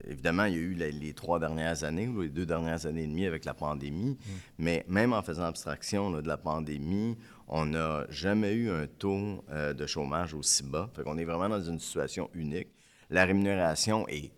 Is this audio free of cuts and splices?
no; 1 cut; at 10.9 s

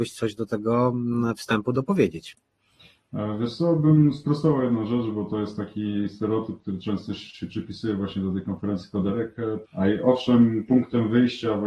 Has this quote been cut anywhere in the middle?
yes; 1 cut; at 9.6 s

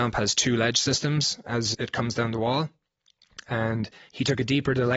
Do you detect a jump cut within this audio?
yes; 1 cut; at 1.7 s

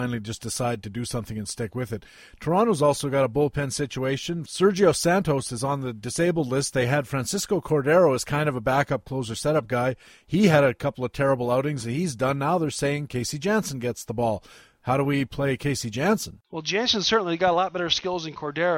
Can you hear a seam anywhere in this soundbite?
no; 0 cuts

